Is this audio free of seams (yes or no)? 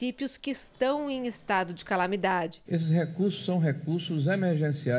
no